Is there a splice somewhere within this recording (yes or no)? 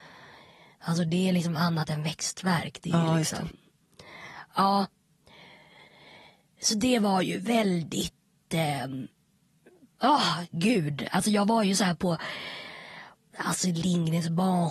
no